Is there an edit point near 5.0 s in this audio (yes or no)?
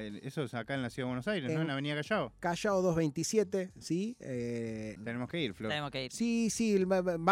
yes